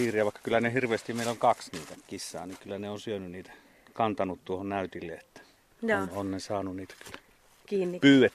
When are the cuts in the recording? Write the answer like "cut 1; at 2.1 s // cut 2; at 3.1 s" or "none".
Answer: none